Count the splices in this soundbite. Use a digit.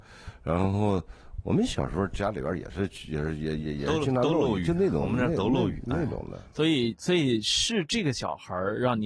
0